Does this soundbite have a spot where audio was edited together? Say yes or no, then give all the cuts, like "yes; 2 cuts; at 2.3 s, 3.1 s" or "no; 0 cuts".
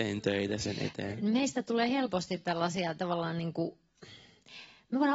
no; 0 cuts